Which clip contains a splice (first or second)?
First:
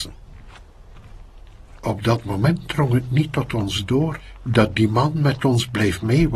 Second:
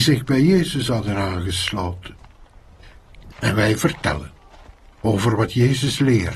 second